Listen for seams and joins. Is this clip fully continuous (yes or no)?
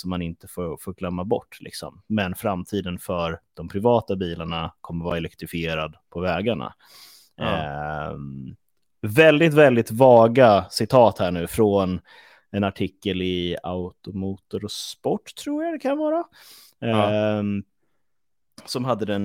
yes